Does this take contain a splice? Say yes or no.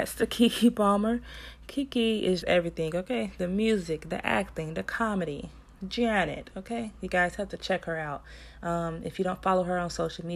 yes